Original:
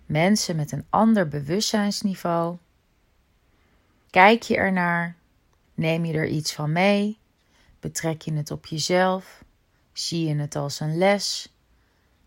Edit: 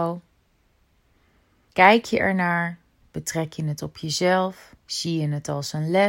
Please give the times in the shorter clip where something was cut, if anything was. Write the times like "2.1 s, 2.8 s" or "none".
3.0 s, 4.8 s